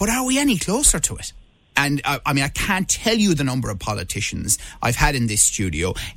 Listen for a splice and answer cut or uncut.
cut